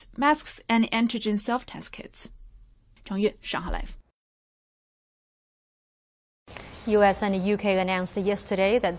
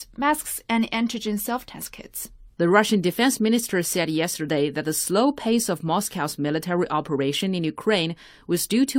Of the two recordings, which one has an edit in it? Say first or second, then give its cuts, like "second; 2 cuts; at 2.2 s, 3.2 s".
second; 1 cut; at 2.5 s